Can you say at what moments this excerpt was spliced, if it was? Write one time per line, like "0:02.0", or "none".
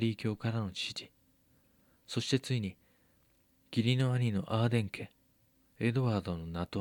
none